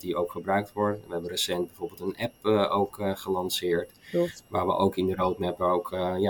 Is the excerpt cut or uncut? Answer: uncut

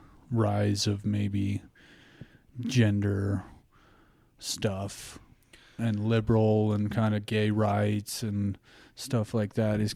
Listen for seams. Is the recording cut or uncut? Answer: uncut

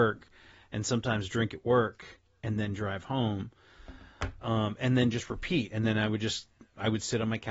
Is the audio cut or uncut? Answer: uncut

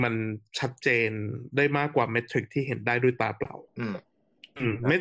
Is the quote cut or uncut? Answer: cut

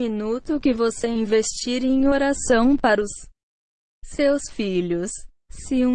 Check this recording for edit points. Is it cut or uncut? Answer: uncut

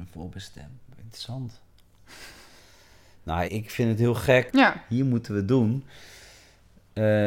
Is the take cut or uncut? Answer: cut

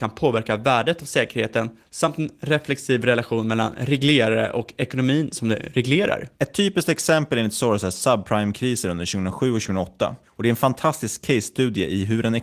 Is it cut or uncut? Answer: uncut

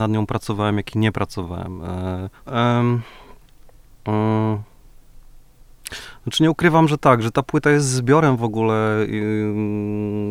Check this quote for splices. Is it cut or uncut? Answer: cut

